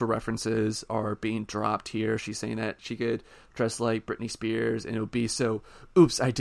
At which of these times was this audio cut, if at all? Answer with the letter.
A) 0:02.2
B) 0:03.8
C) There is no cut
C